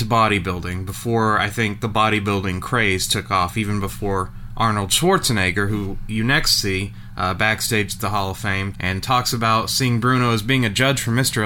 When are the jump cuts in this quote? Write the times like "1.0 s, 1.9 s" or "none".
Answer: 8.7 s

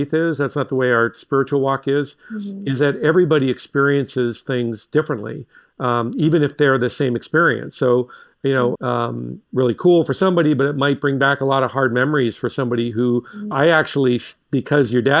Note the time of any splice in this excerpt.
8.7 s, 13.5 s

